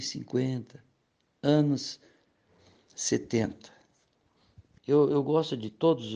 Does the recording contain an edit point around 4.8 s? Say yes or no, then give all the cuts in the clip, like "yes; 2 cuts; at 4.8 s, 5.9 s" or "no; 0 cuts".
yes; 1 cut; at 4.8 s